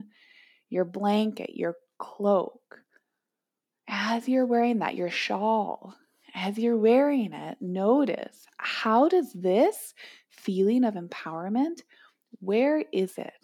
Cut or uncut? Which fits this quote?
uncut